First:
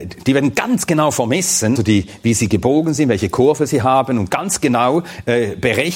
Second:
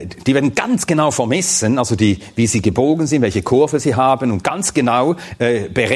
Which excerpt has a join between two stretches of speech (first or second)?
first